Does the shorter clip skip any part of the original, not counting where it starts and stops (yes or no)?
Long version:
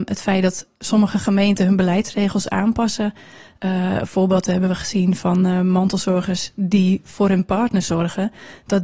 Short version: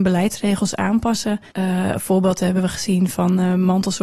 yes